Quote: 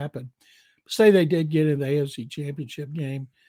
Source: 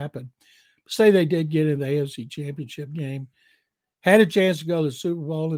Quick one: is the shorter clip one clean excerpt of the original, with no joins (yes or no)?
yes